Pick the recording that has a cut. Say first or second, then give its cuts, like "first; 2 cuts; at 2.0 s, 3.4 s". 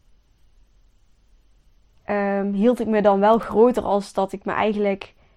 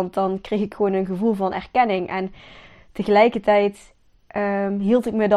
first; 1 cut; at 2.1 s